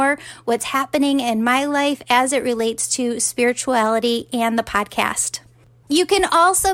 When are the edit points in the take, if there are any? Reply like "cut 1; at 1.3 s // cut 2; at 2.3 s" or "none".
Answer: cut 1; at 5.8 s

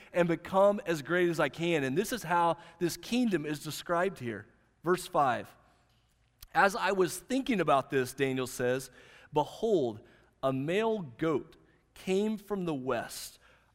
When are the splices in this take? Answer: none

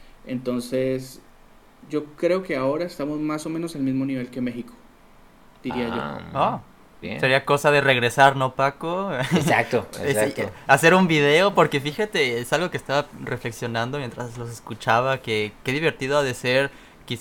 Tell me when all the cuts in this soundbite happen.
cut 1; at 7.0 s

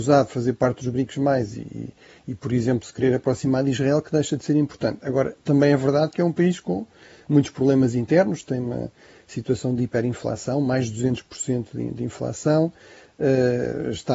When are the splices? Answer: none

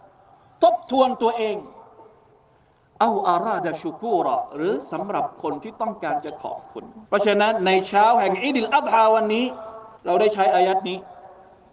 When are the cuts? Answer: cut 1; at 7.0 s // cut 2; at 10.0 s

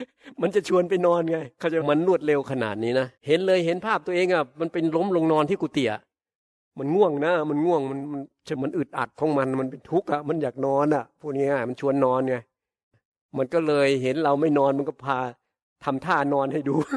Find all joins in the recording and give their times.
cut 1; at 1.8 s // cut 2; at 3.2 s // cut 3; at 8.5 s

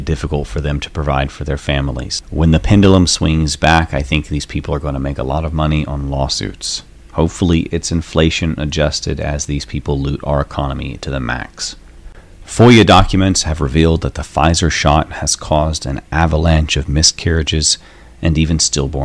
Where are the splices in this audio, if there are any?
none

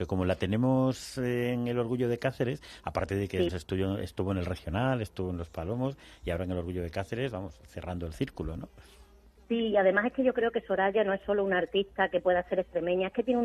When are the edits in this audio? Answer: cut 1; at 3.5 s

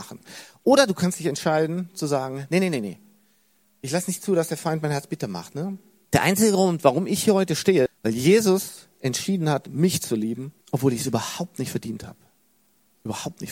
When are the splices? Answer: cut 1; at 6.1 s // cut 2; at 7.9 s // cut 3; at 10.6 s

